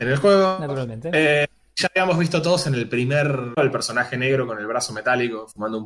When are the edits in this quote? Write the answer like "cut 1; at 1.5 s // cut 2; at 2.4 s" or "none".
cut 1; at 3.6 s